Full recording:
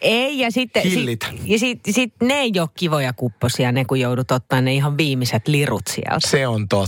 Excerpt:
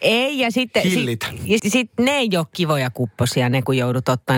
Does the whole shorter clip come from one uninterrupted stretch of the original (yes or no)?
no